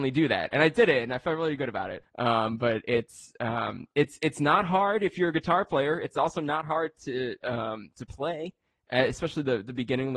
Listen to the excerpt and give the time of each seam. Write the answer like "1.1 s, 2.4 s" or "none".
2.0 s